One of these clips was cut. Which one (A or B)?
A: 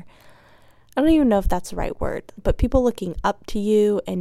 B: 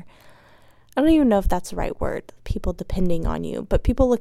A